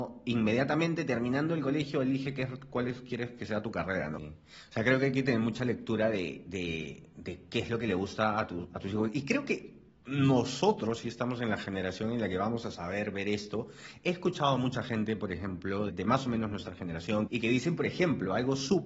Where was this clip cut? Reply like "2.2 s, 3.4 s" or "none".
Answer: 4.2 s, 15.9 s, 17.3 s